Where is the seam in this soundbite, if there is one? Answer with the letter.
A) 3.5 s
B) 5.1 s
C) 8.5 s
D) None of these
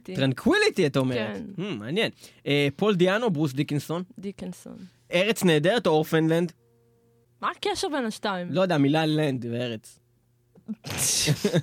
B